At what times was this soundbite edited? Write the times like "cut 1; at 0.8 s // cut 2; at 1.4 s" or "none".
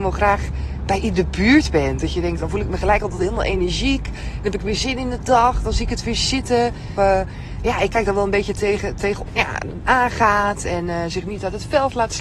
cut 1; at 2.4 s // cut 2; at 7.0 s // cut 3; at 9.3 s